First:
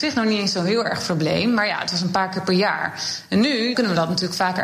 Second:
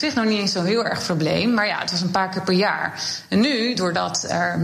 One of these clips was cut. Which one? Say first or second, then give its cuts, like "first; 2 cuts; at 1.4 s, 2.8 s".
first; 1 cut; at 3.7 s